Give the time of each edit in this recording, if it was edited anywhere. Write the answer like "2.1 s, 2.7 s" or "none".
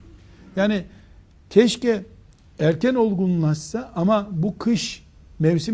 none

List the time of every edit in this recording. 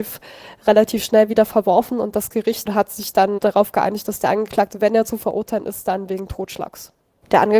3.4 s

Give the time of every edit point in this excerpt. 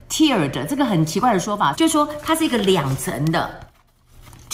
1.7 s

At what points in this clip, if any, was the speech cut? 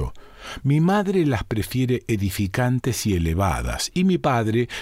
none

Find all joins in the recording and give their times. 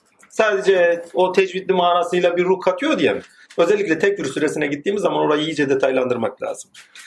3.5 s

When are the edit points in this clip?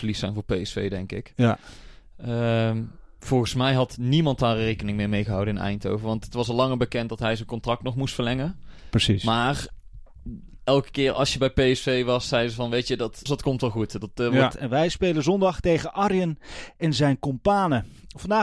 13.3 s, 14.5 s

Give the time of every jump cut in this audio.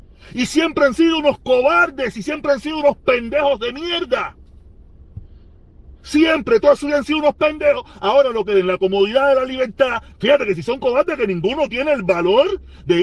10.1 s

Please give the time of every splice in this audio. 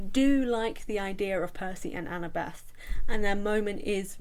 none

